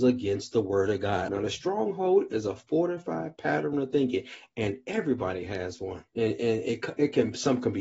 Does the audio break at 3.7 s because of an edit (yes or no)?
no